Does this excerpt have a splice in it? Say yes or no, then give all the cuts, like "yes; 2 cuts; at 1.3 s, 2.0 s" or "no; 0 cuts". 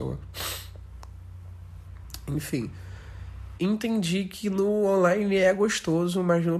yes; 1 cut; at 3.6 s